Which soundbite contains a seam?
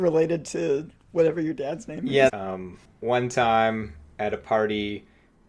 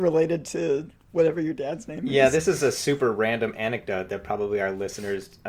first; 1 cut; at 2.3 s

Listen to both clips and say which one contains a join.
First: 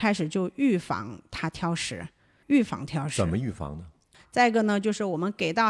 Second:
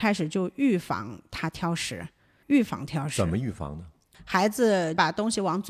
first; 1 cut; at 4.2 s

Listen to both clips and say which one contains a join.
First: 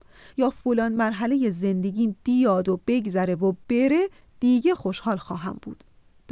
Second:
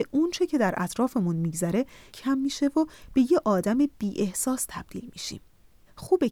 first; 1 cut; at 4.8 s

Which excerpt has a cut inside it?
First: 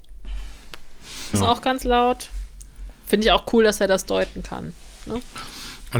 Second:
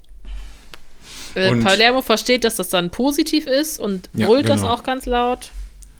first; 1 cut; at 1.3 s

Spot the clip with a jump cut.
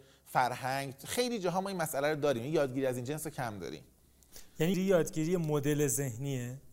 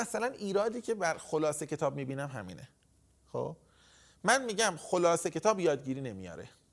first; 1 cut; at 4.7 s

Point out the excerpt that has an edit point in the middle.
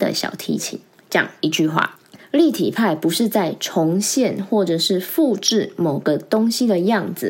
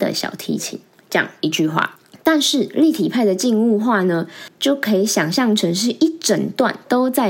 first; 1 cut; at 2.2 s

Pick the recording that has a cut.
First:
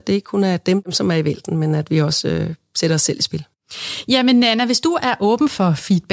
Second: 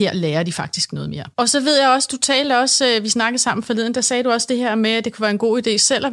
second; 1 cut; at 1.3 s

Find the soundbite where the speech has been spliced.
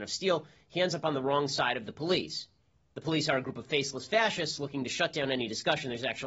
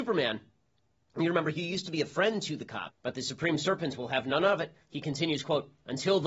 second; 1 cut; at 2.9 s

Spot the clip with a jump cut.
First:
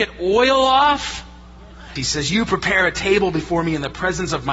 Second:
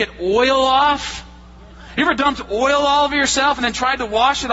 first; 1 cut; at 2.0 s

